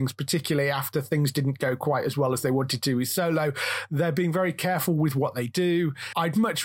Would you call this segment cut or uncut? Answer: uncut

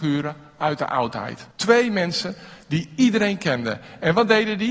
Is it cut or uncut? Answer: cut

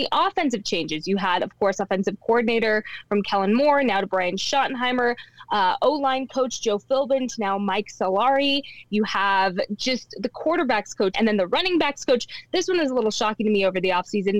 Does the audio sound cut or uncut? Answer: cut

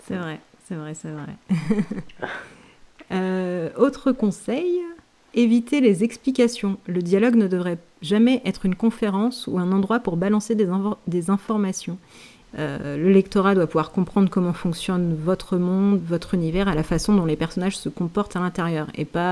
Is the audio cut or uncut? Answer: cut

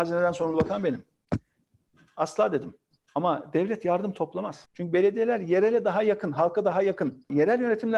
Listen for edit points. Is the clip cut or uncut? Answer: cut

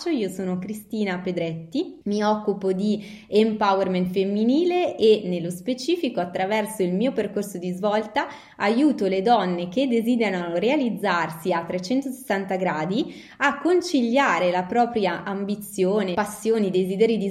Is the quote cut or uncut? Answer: cut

